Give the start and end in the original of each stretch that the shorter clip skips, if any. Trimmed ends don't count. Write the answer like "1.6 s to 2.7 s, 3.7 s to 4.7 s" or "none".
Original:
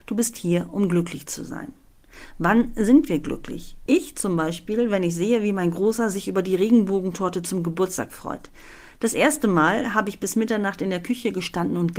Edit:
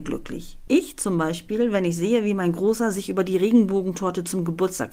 none